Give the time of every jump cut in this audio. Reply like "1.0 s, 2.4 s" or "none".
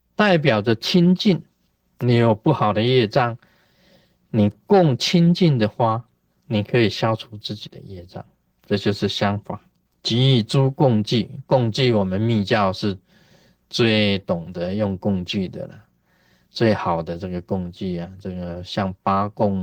none